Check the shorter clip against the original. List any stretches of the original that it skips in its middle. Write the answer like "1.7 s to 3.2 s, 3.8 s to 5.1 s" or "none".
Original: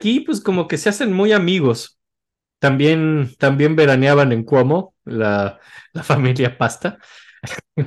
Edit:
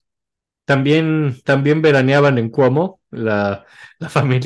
none